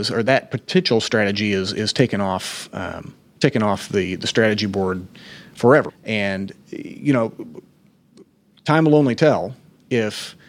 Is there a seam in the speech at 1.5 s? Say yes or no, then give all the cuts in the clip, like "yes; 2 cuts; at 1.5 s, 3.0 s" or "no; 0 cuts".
no; 1 cut; at 5.9 s